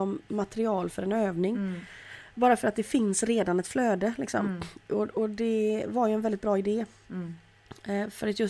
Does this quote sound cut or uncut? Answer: uncut